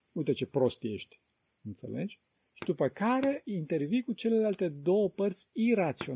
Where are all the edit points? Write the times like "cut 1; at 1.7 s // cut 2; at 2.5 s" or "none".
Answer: cut 1; at 2.3 s